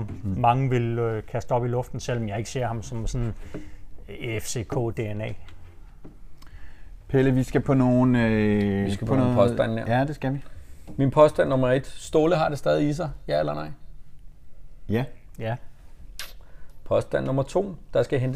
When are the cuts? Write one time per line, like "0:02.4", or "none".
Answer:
none